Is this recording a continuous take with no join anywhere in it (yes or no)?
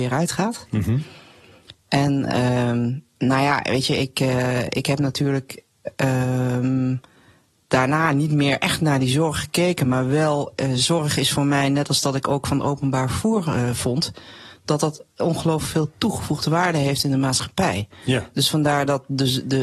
yes